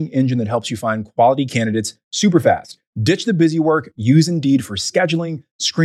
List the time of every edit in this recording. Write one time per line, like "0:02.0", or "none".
none